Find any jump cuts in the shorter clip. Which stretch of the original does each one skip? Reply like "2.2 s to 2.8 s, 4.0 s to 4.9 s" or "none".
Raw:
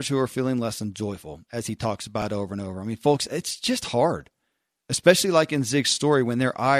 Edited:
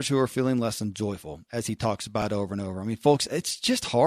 none